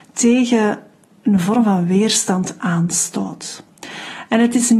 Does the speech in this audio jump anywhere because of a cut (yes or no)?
no